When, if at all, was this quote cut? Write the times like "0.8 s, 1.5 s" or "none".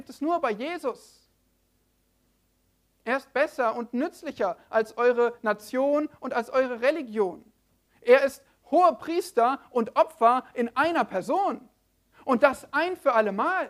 none